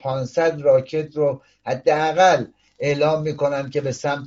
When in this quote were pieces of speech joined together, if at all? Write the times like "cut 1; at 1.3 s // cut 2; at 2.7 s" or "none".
none